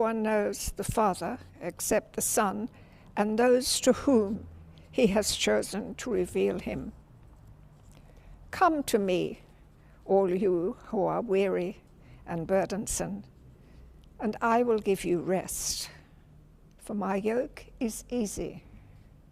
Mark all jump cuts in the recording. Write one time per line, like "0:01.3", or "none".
0:16.7